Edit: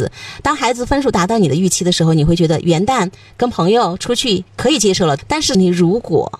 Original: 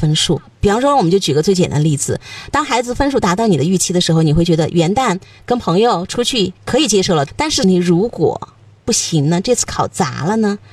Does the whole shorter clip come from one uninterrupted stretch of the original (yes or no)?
yes